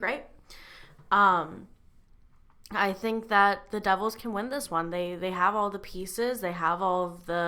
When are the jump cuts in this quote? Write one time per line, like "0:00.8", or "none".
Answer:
none